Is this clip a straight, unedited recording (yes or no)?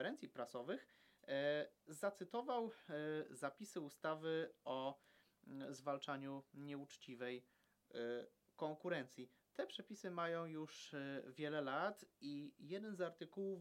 yes